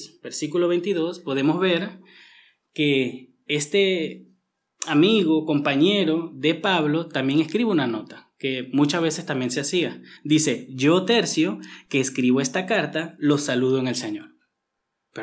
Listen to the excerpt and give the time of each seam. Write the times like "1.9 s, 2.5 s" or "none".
none